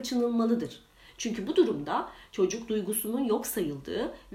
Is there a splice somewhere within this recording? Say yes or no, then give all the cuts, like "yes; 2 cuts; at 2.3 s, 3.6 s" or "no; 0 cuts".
no; 0 cuts